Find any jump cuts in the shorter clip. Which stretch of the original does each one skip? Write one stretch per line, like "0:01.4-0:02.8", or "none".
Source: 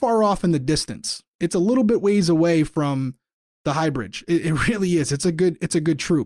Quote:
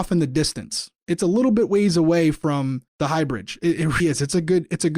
0:03.2-0:03.5
0:04.7-0:04.9